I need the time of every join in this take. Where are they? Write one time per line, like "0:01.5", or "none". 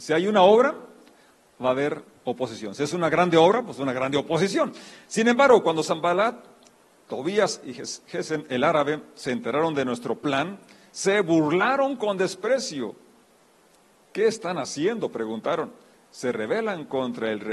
none